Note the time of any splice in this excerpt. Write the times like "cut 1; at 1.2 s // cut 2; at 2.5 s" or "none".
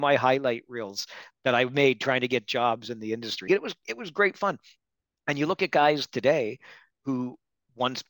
cut 1; at 3.5 s